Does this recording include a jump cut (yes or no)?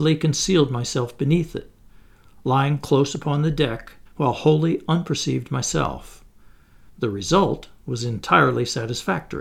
yes